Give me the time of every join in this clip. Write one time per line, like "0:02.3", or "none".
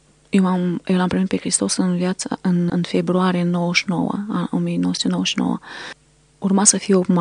0:02.7